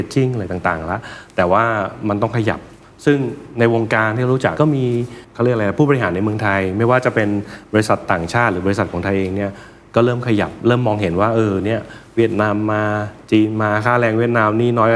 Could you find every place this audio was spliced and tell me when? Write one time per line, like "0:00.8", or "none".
0:04.5